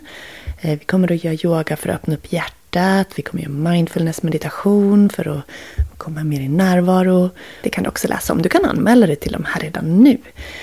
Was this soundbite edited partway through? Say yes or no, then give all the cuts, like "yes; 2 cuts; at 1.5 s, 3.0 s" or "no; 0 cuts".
yes; 1 cut; at 7.6 s